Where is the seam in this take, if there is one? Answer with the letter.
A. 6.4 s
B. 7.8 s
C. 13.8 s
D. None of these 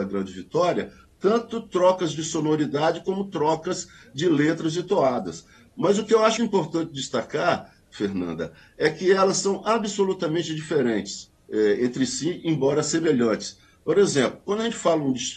A